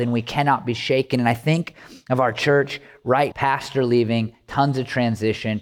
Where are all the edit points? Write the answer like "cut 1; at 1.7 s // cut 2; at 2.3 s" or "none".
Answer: cut 1; at 3.3 s